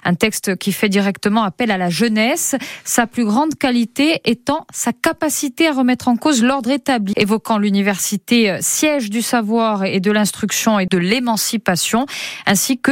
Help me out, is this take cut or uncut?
cut